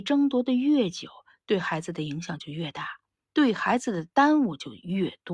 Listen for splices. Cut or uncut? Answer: uncut